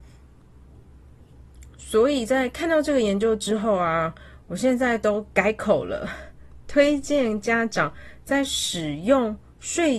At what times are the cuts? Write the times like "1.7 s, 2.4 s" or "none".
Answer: none